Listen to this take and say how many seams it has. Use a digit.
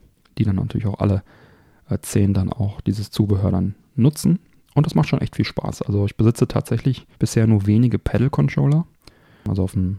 1